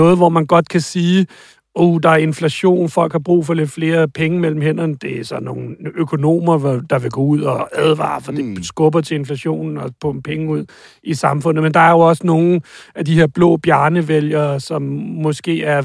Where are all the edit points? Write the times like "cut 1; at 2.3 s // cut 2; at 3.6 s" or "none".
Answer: none